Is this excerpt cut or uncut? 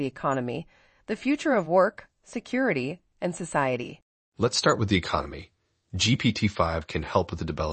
uncut